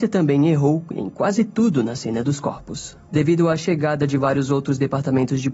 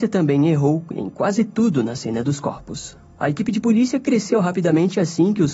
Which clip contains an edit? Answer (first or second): first